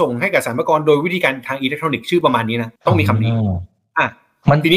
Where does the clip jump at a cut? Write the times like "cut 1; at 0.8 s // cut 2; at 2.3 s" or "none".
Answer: cut 1; at 2.8 s